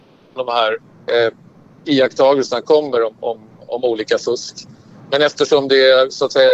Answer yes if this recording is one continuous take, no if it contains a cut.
yes